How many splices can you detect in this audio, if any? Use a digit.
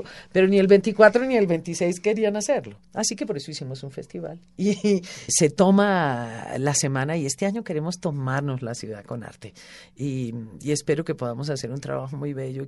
2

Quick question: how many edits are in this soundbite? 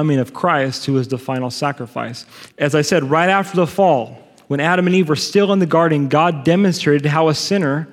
1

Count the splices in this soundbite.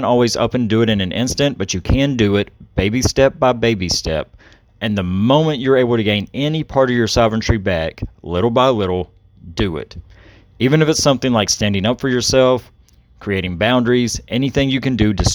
0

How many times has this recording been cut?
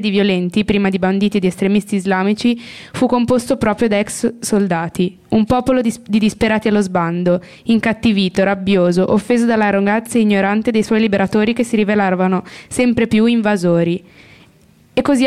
0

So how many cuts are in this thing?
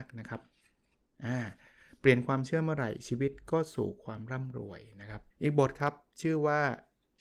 1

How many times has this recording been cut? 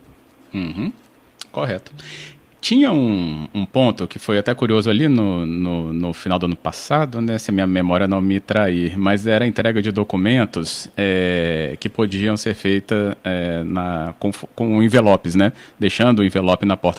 0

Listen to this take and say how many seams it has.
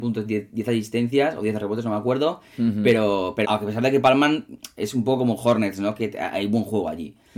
1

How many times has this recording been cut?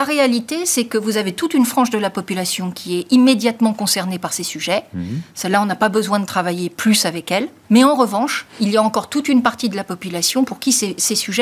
1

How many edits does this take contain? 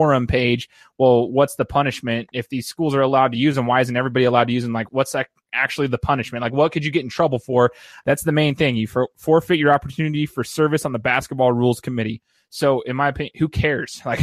2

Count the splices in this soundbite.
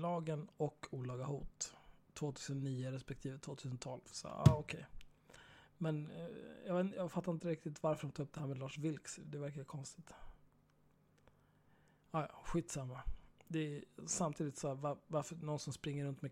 0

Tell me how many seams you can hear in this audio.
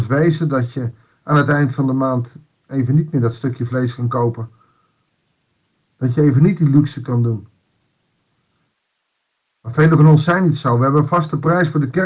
0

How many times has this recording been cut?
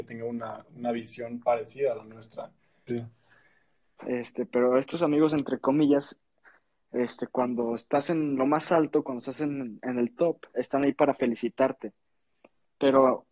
1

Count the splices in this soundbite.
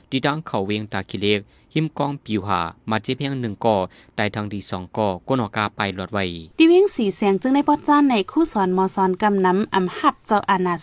1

